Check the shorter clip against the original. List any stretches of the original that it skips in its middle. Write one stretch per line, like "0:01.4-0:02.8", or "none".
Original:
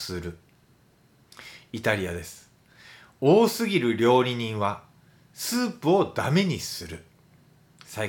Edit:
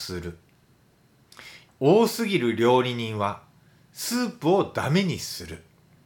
0:01.7-0:03.1